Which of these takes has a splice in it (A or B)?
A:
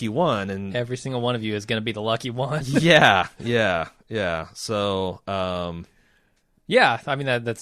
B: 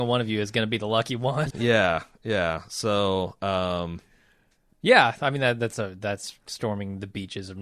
B